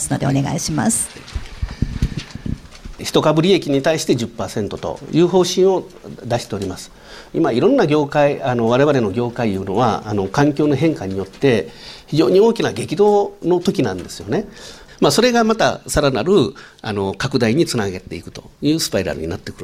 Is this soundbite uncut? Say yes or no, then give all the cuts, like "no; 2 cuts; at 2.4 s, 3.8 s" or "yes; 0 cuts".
no; 1 cut; at 14.9 s